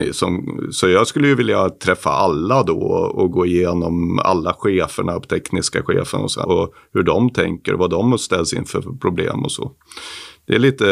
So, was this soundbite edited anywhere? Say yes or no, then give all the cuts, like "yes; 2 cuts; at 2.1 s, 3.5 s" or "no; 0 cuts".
yes; 1 cut; at 6.4 s